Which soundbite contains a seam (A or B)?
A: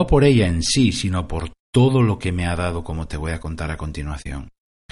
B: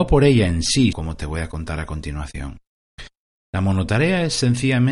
B